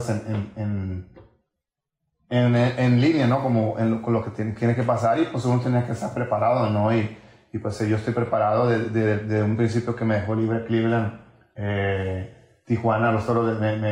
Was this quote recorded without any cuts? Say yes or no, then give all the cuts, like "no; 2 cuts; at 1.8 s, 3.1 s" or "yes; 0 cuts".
yes; 0 cuts